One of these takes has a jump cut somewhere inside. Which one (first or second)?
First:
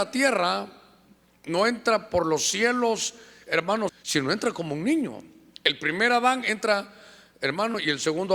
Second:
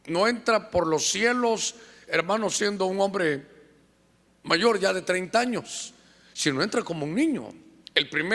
first